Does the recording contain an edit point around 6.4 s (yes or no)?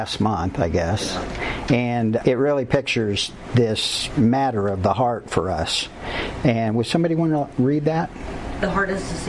no